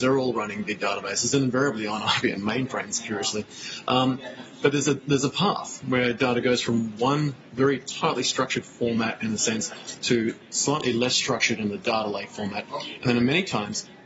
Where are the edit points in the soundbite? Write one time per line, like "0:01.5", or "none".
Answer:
none